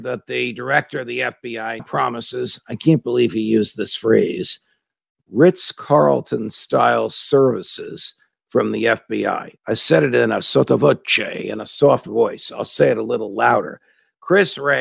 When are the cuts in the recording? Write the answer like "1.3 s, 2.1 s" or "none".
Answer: 1.8 s